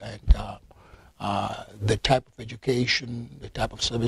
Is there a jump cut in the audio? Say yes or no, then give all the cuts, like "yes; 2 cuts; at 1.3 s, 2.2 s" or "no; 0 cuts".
no; 0 cuts